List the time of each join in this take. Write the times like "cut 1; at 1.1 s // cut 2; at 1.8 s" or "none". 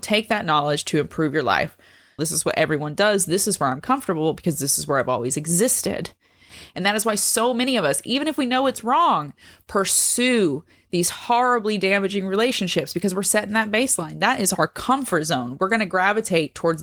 cut 1; at 2.2 s